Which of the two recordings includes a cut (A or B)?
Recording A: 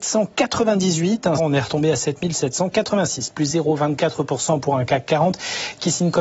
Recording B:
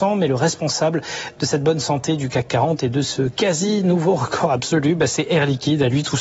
A